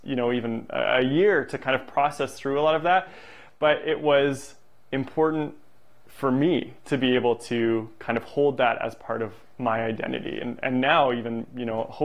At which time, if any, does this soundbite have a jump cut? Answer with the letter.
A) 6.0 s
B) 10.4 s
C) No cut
C